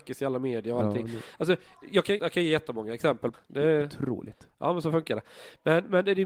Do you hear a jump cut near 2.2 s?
yes; 2 cuts; at 2.2 s, 3.3 s

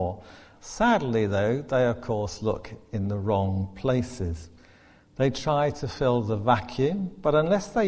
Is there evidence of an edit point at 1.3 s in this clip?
no; 0 cuts

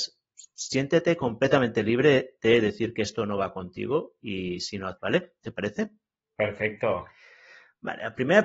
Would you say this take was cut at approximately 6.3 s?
no; 1 cut; at 5.0 s

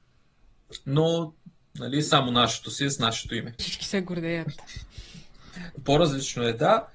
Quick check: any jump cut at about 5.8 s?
no; 1 cut; at 3.6 s

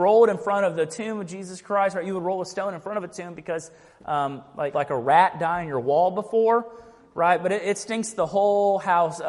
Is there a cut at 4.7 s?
yes; 1 cut; at 4.7 s

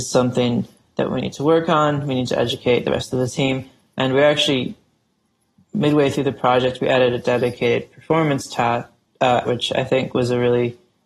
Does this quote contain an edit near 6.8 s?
no; 1 cut; at 9.5 s

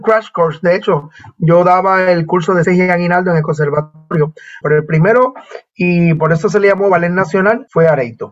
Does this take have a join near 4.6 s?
yes; 2 cuts; at 2.6 s, 4.6 s

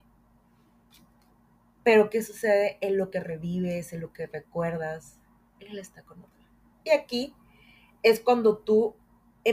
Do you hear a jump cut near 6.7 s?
yes; 1 cut; at 6.7 s

